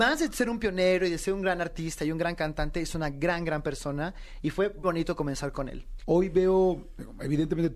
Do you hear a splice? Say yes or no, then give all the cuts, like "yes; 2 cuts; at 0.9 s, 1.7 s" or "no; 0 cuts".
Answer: yes; 2 cuts; at 4.8 s, 6.0 s